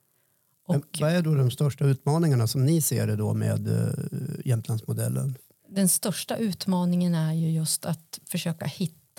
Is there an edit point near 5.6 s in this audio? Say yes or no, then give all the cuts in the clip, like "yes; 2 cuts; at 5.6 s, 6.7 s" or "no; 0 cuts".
yes; 1 cut; at 5.6 s